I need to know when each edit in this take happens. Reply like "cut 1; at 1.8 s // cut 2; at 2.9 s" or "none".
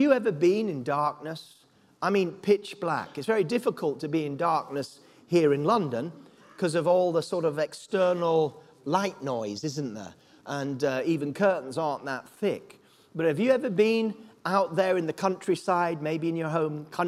none